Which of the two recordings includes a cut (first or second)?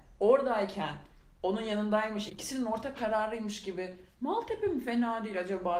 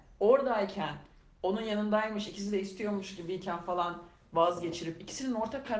first